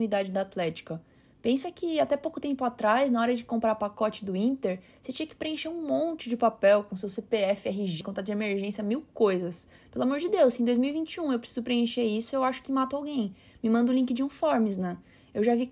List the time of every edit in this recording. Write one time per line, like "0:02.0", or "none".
0:08.0

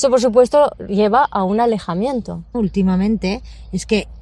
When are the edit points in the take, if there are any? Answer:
0:02.5

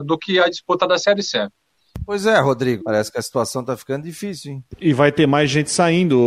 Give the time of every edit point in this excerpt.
0:02.8

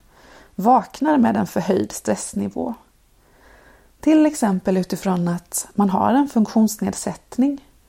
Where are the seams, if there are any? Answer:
none

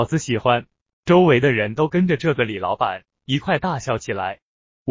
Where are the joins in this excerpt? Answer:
0:00.9

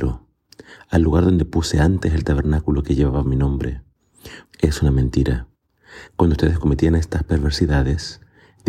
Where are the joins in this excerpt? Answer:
0:04.4
0:06.1

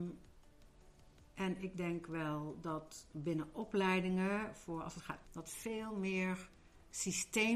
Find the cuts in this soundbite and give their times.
0:05.2

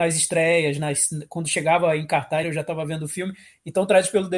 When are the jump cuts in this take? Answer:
0:02.4

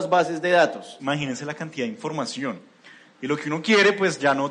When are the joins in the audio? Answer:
0:01.0

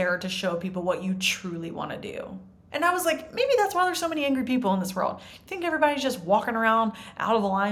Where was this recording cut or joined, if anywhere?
0:02.7

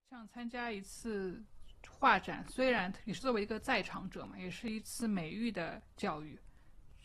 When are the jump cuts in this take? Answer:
none

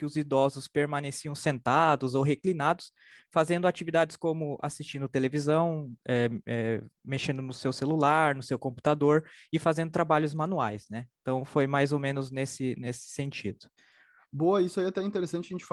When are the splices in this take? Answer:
none

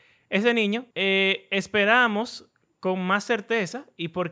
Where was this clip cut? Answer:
0:00.9

